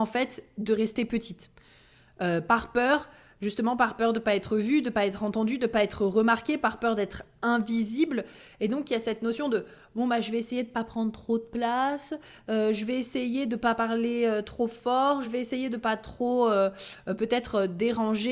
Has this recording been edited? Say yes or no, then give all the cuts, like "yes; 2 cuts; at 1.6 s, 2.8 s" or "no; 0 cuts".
no; 0 cuts